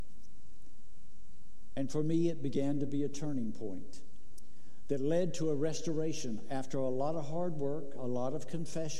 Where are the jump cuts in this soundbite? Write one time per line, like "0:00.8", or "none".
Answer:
none